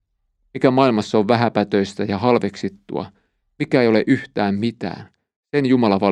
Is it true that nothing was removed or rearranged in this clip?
yes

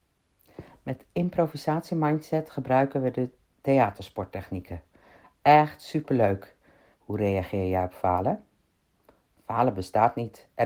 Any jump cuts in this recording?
yes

